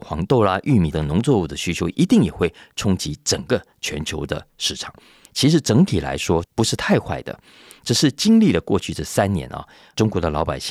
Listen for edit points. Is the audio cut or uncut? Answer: cut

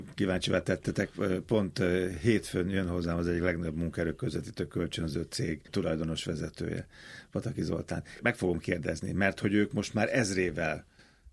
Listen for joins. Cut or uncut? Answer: uncut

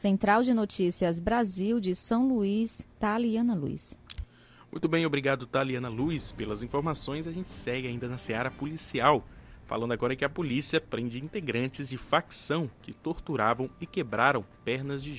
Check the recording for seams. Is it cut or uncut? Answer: uncut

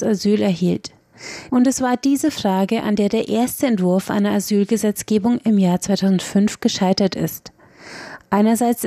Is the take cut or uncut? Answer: cut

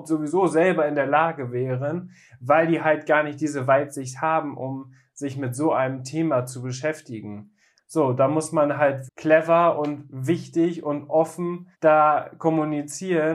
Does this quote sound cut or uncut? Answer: cut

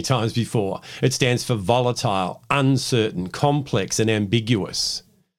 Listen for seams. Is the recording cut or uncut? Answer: uncut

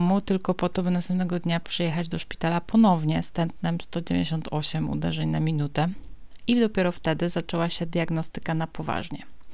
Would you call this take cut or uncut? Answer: uncut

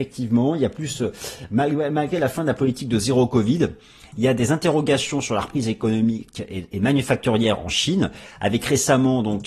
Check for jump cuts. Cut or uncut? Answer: uncut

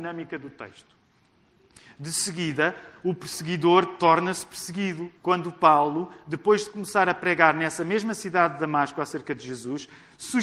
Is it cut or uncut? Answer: cut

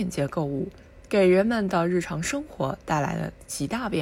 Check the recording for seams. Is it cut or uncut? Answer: uncut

